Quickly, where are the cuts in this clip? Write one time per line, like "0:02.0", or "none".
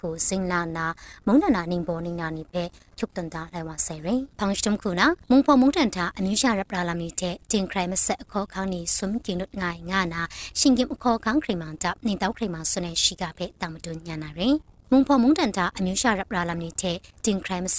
0:04.3